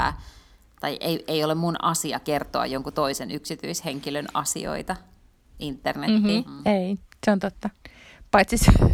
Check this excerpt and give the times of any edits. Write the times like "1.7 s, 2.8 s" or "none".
6.4 s